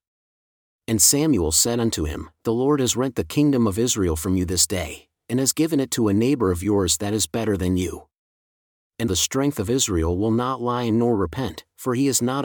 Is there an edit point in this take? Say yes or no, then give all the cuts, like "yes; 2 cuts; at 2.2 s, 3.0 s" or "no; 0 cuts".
yes; 1 cut; at 9.1 s